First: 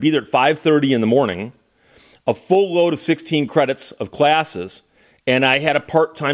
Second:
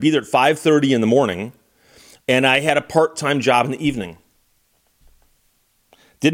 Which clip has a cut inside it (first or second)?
second